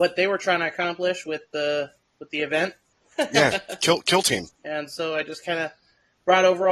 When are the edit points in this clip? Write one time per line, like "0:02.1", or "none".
0:02.9
0:04.5